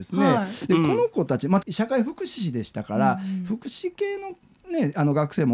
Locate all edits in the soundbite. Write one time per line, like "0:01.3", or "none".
0:01.6